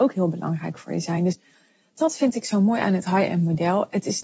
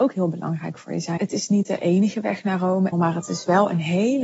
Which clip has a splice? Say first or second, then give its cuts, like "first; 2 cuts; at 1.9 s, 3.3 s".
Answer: second; 2 cuts; at 1.2 s, 2.9 s